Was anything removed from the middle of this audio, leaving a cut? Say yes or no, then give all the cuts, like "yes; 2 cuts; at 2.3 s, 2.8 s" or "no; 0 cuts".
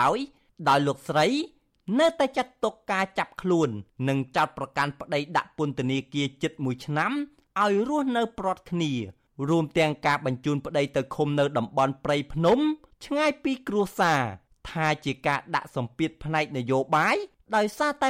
no; 0 cuts